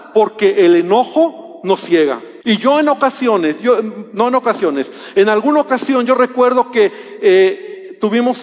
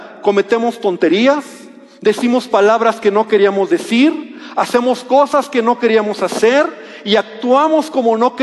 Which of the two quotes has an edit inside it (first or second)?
first